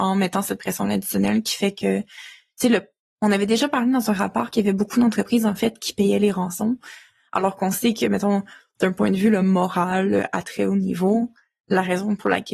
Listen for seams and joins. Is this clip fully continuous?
yes; 0 cuts

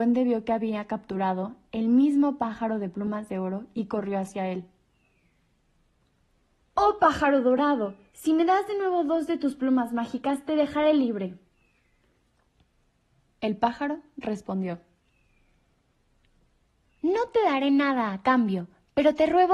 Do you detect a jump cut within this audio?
no; 0 cuts

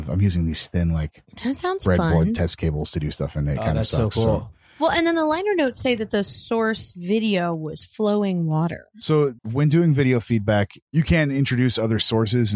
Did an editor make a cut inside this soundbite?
yes; 1 cut; at 9.4 s

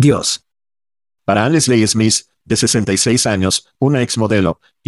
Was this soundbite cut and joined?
no; 0 cuts

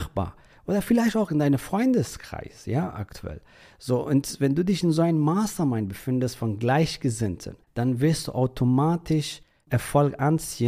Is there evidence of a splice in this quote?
yes; 1 cut; at 7.6 s

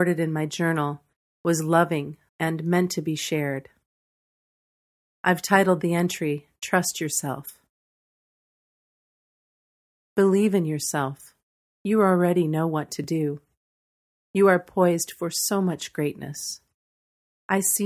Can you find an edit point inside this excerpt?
yes; 1 cut; at 2.3 s

